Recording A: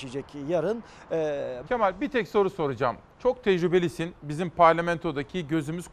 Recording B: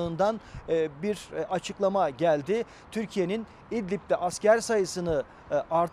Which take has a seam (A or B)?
A